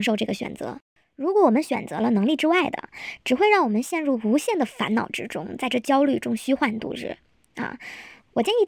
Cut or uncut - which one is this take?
uncut